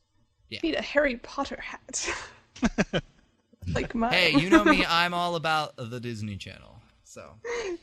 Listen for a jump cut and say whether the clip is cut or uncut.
uncut